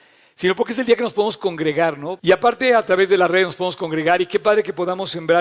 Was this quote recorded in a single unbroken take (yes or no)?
no